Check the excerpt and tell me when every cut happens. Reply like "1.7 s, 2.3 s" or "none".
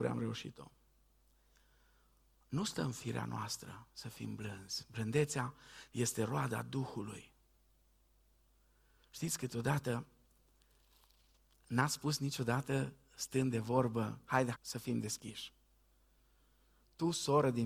14.5 s